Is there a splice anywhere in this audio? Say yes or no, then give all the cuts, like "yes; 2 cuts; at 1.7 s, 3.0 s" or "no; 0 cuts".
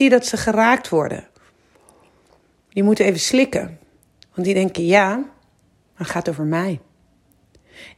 no; 0 cuts